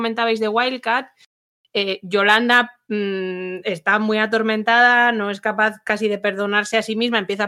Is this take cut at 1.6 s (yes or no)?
no